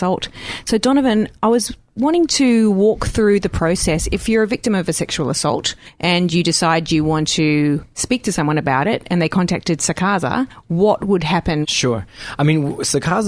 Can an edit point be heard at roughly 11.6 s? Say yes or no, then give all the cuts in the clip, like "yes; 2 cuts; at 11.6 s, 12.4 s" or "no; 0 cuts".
yes; 1 cut; at 11.6 s